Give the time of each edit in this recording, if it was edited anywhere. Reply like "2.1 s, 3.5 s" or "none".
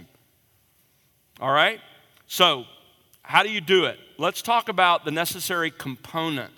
none

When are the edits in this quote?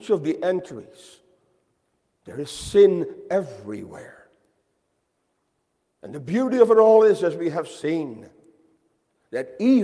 none

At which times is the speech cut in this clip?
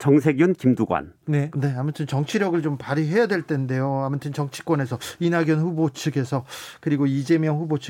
1.5 s

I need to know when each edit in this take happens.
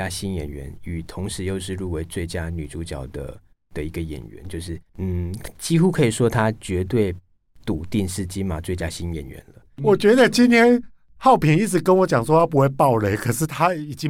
4.9 s

